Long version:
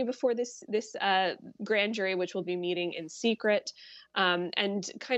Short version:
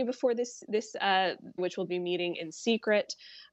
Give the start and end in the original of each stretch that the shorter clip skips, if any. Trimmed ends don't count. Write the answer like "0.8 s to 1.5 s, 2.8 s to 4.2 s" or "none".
1.6 s to 2.1 s